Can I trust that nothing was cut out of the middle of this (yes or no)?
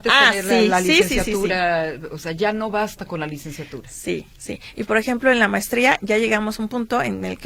yes